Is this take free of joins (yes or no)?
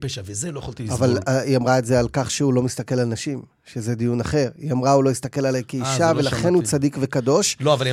yes